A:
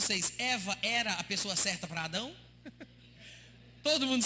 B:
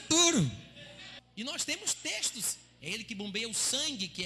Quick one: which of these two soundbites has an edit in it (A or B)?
B